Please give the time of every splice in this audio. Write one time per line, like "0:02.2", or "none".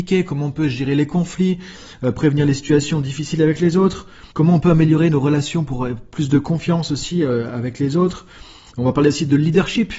0:04.3